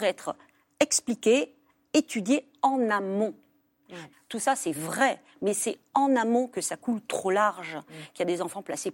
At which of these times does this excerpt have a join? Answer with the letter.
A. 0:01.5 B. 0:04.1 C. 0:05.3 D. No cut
B